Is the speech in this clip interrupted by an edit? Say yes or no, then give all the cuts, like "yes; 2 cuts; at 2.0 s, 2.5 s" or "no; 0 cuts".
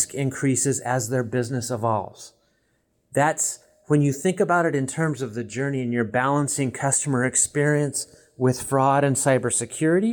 no; 0 cuts